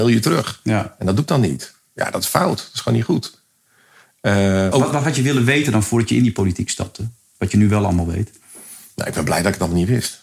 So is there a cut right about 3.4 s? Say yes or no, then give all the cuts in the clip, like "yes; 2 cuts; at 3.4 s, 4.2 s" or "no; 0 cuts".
no; 1 cut; at 4.7 s